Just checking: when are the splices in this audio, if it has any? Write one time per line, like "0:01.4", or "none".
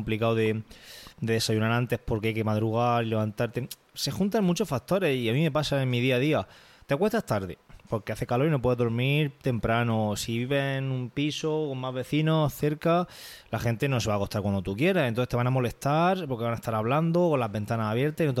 none

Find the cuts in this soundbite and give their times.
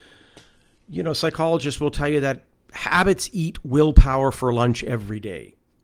none

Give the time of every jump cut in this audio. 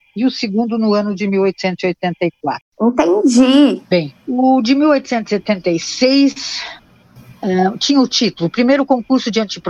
none

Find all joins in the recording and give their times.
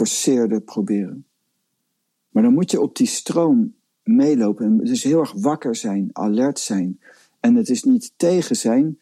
none

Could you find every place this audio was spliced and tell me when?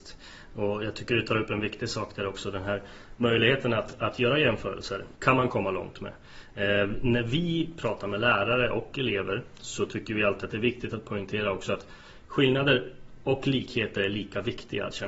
0:05.2

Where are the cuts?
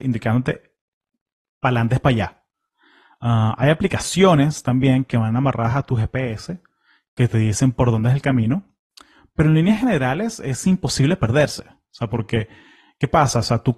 none

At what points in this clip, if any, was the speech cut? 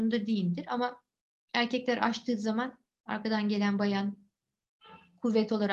none

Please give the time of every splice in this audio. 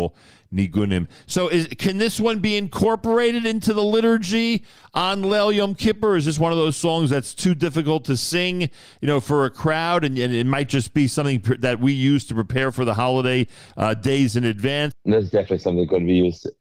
0:14.9

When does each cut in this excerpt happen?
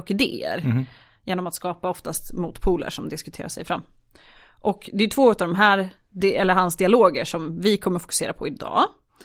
none

